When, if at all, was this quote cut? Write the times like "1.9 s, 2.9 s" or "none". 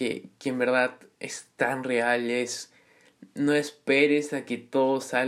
none